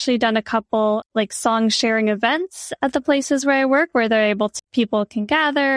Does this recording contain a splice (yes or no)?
yes